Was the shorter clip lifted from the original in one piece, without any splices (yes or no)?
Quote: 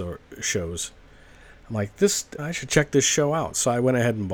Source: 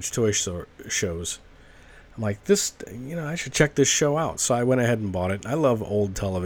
no